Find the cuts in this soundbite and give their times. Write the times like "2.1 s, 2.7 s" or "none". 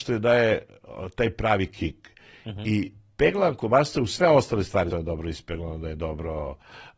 4.9 s